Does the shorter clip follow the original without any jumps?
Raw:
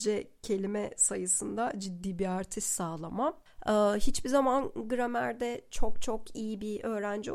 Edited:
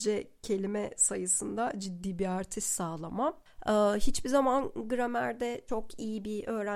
no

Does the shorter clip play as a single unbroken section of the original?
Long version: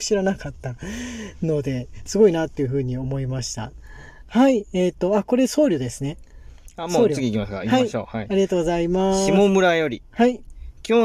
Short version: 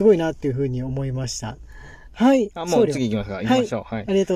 no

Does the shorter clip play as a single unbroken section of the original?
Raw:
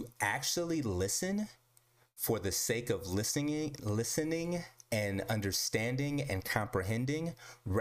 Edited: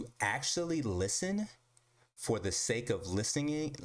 yes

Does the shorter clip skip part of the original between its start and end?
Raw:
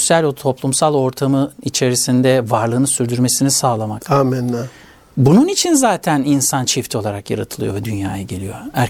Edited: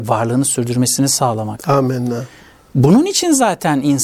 no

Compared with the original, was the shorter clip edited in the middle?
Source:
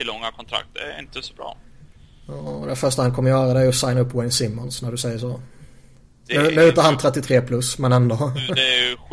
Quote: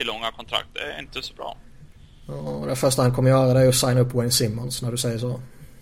no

